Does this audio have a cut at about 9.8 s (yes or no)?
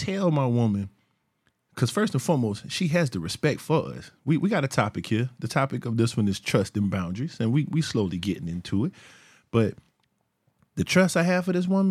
no